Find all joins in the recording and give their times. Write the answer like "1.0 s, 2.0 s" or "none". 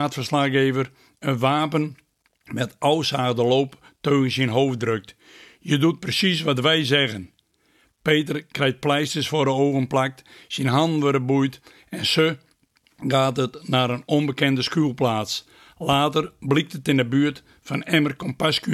none